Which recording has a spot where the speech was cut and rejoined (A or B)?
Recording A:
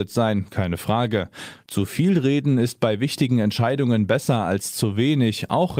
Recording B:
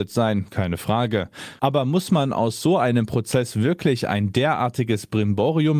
B